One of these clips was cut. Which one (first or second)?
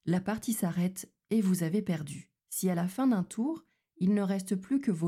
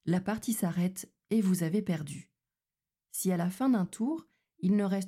first